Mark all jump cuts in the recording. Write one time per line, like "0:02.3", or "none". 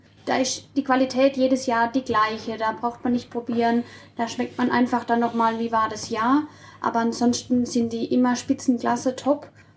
none